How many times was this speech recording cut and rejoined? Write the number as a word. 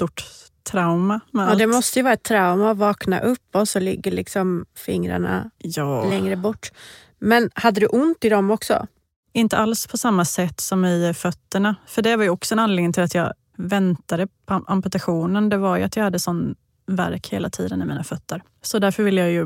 zero